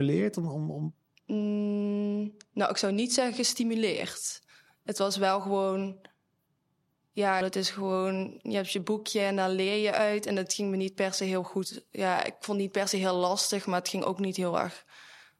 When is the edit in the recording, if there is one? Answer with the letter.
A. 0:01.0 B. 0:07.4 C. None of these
B